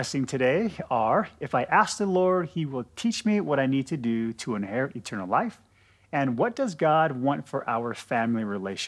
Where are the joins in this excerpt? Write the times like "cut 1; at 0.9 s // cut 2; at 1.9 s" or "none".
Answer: none